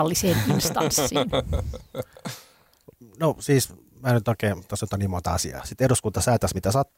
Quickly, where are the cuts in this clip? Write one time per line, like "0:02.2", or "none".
0:05.6